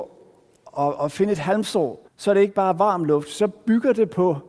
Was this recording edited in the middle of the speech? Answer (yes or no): yes